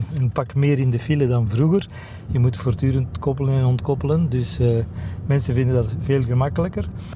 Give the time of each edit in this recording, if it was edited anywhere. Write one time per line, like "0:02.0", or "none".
0:02.3

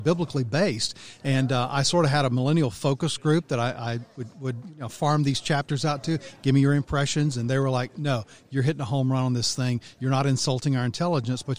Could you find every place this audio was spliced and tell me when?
none

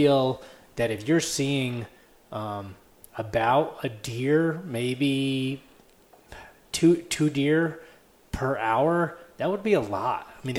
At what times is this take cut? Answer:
none

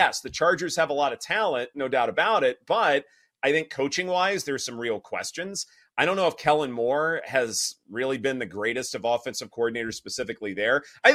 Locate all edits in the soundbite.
none

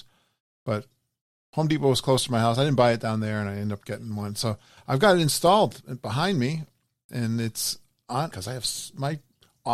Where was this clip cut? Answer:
0:08.3

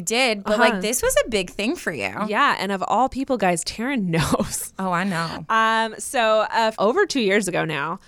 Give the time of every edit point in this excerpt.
0:06.7

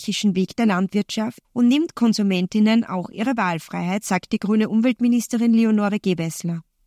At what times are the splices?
0:01.4

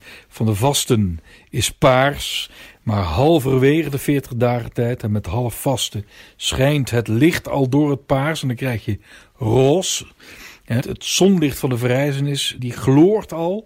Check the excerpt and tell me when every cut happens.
0:10.8
0:12.6

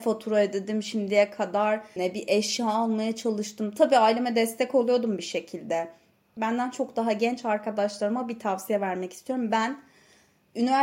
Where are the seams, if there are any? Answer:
0:02.0
0:06.4

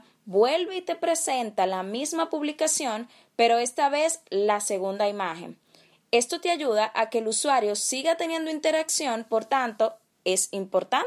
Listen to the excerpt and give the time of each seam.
none

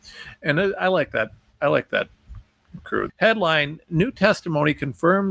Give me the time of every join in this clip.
0:03.1

